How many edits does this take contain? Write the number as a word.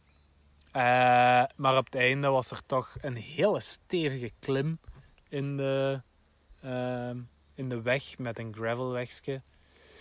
zero